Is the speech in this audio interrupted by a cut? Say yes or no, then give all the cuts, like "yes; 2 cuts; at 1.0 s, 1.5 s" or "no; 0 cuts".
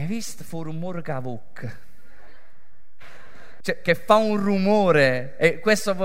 yes; 1 cut; at 3.6 s